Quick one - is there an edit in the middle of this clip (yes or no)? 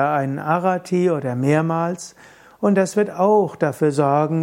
no